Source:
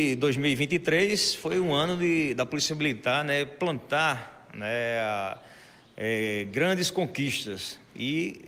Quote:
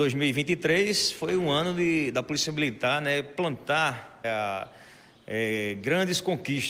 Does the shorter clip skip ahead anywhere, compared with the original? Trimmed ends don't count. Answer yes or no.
yes